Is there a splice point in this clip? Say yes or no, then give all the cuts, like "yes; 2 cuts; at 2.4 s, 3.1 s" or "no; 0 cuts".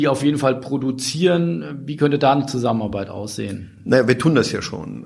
no; 0 cuts